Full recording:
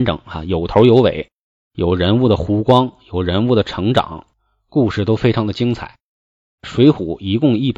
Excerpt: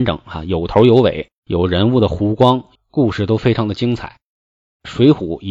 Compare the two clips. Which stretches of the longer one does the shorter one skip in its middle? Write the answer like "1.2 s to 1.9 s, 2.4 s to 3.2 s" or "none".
1.4 s to 1.7 s, 3.0 s to 4.5 s

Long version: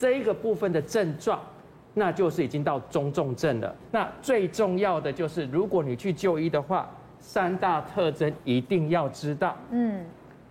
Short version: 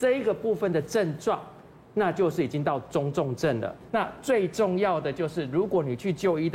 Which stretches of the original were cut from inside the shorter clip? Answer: none

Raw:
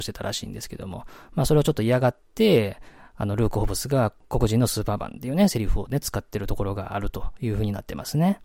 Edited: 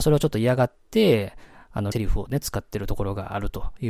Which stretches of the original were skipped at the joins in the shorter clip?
3.4 s to 5.5 s

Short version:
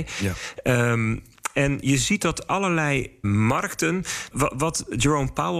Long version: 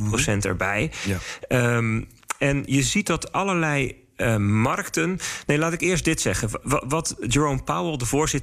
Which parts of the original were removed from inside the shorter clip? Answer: 4.1 s to 4.4 s, 5.5 s to 6.6 s

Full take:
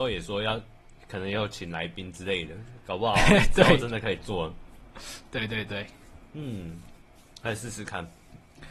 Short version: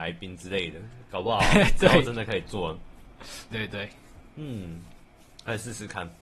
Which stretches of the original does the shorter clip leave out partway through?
5.3 s to 5.5 s

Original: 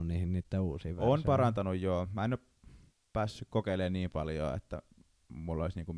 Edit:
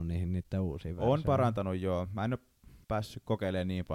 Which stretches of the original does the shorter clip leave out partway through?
2.8 s to 3.1 s

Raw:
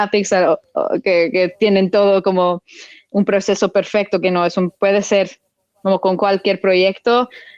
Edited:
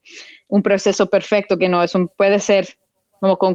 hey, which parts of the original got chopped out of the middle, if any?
none

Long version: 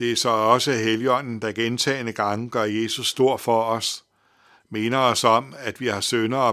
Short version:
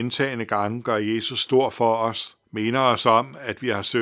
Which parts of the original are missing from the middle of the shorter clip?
4.1 s to 4.6 s

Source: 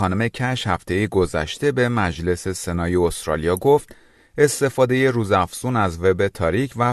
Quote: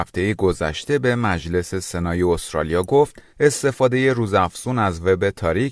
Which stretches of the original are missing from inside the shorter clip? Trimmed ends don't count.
4.0 s to 4.3 s

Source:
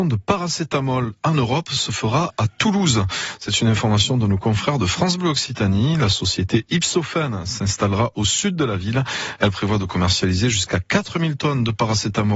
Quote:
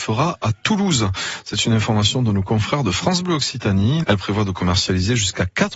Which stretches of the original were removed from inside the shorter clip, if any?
6.0 s to 9.4 s

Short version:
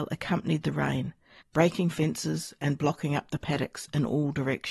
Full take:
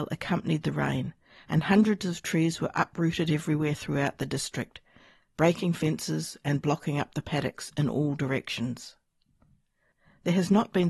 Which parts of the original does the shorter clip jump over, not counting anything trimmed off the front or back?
1.4 s to 5.2 s

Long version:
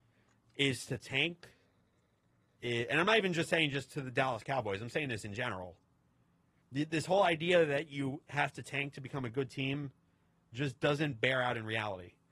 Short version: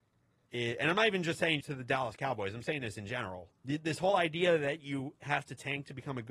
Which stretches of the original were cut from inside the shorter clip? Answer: 3.7 s to 3.9 s, 5.9 s to 6.7 s

